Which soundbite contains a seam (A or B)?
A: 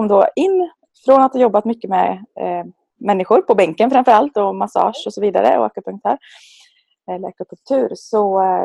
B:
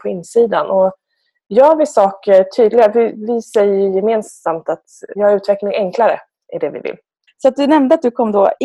B